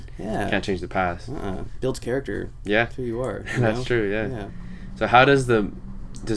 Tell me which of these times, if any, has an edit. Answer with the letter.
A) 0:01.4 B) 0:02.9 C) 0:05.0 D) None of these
D